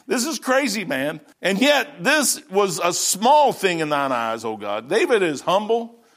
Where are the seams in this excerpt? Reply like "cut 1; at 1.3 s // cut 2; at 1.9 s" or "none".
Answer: cut 1; at 1.3 s